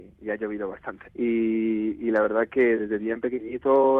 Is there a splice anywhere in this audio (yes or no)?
yes